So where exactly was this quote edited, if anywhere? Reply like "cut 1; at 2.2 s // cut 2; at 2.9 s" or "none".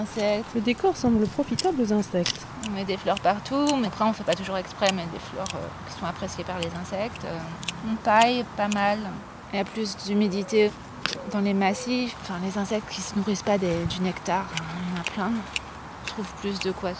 none